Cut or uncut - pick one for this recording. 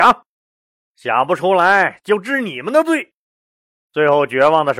uncut